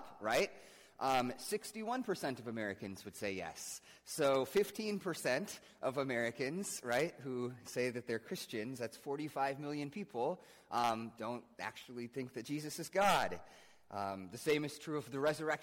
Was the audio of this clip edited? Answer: no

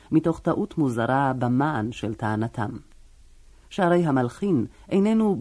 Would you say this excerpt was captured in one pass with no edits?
yes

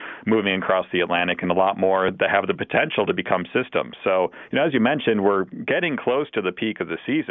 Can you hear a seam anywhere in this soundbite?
no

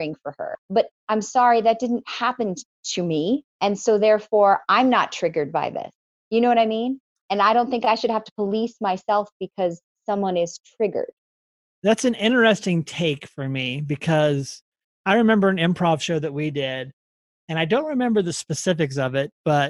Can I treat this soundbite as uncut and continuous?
yes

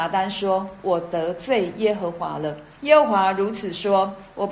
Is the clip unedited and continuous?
no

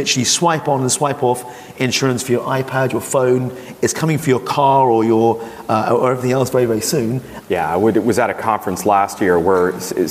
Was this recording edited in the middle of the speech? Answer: yes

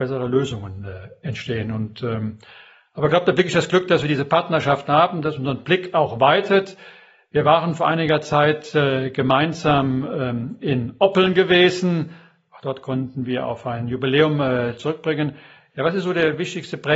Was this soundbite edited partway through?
no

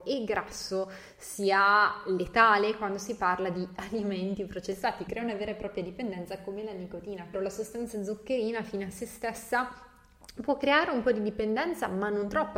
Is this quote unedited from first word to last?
no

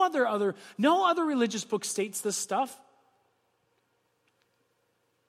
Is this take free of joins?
yes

